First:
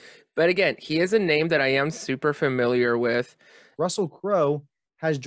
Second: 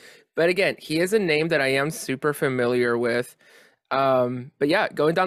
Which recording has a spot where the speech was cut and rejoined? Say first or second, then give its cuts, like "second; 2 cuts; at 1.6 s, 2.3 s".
first; 1 cut; at 3.8 s